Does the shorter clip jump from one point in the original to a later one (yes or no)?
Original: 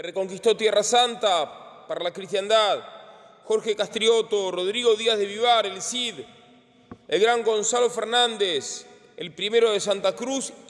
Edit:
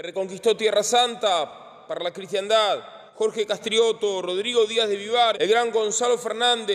yes